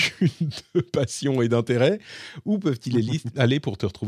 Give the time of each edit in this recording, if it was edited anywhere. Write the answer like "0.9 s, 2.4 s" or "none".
none